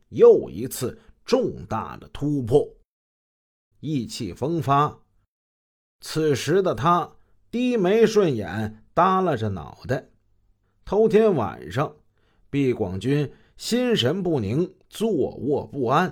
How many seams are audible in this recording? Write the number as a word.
one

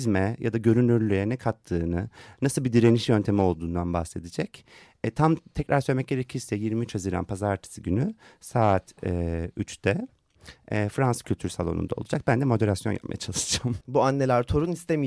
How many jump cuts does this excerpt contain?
one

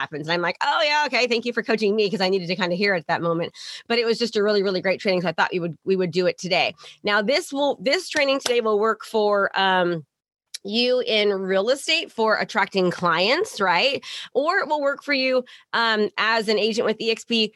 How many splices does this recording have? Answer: zero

